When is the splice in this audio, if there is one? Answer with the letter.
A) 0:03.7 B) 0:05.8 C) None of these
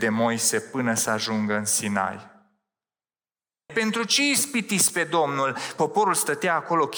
A